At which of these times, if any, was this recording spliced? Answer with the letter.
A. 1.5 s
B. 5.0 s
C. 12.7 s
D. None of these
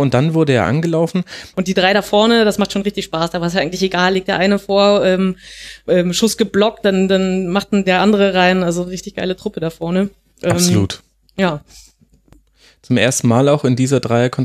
A